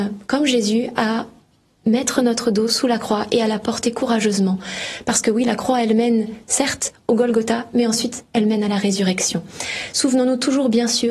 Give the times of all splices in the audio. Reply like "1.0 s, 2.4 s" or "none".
none